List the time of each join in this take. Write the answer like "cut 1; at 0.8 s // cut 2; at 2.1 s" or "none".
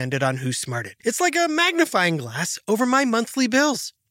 cut 1; at 1.0 s